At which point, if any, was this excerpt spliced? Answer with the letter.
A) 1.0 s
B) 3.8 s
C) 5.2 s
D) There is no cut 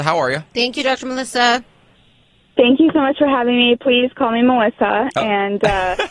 D